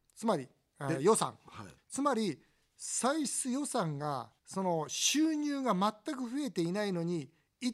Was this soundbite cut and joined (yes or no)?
yes